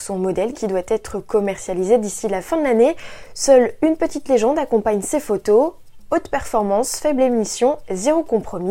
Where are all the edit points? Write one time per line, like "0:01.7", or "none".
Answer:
none

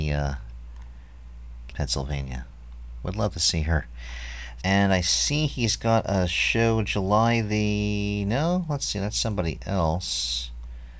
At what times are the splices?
0:01.7
0:04.6

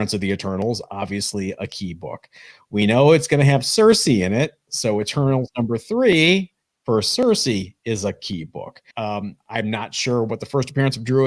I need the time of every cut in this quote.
0:08.9

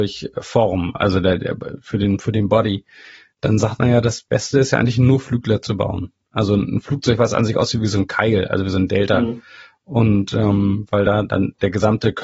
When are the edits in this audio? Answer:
none

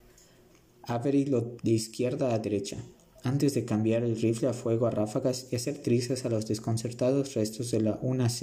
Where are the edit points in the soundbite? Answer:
0:01.6

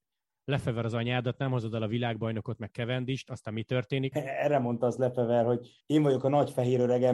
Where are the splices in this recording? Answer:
0:04.1

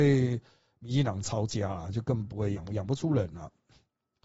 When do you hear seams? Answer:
none

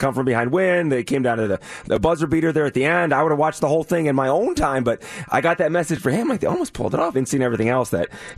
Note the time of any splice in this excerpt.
0:07.1

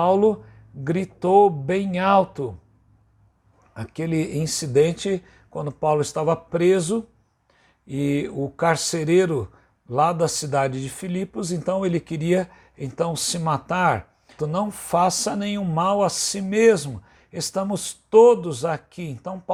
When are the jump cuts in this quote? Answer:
0:14.4

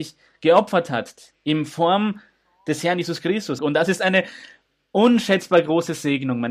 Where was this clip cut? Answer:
0:03.6

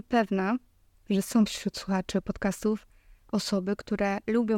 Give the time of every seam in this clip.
none

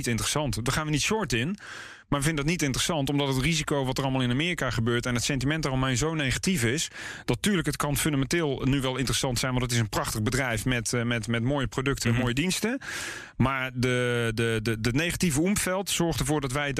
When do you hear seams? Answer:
none

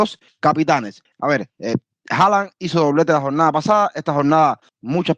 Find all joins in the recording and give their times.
0:01.1

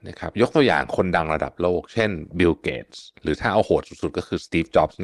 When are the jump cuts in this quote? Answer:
0:03.2

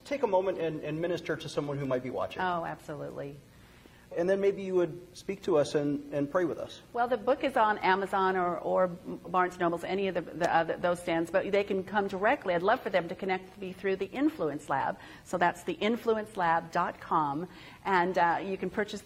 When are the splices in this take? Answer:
0:04.1

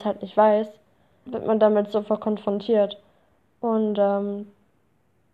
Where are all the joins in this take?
0:01.3

